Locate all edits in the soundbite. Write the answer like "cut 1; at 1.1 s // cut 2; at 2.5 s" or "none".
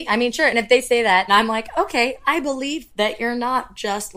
cut 1; at 1.3 s